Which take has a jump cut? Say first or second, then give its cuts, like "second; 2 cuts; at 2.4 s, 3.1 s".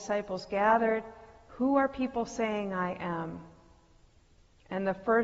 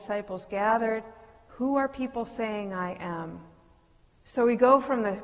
second; 1 cut; at 4.1 s